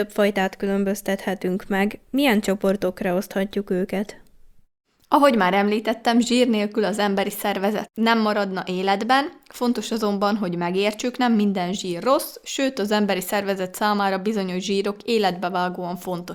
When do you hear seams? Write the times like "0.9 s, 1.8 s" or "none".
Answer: none